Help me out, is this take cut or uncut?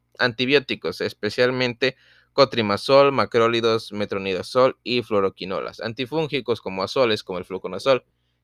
uncut